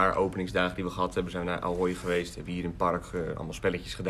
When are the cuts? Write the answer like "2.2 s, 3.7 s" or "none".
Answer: none